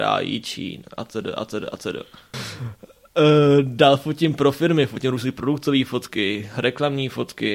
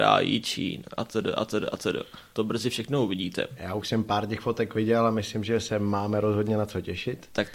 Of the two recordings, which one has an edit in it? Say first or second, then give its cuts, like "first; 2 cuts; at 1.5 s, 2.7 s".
first; 1 cut; at 2.3 s